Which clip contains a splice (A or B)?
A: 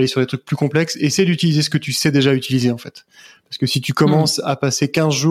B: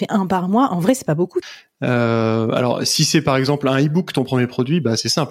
B